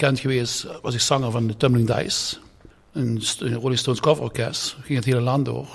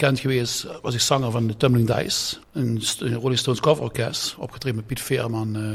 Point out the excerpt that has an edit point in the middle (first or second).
second